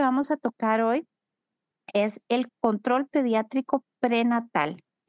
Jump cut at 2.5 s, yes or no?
yes